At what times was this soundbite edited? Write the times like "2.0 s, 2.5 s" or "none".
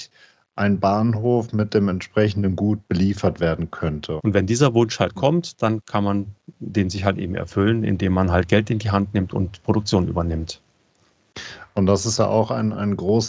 4.2 s